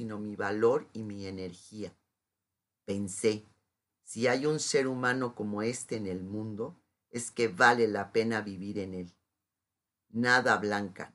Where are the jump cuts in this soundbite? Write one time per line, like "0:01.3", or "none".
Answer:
none